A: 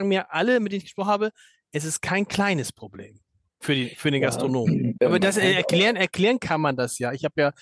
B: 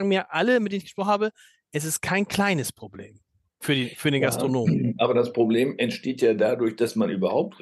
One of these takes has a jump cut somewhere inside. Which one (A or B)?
A